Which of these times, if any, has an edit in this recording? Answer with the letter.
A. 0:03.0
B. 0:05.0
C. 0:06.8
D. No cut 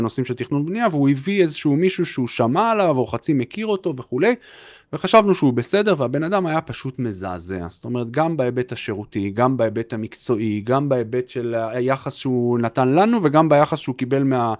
D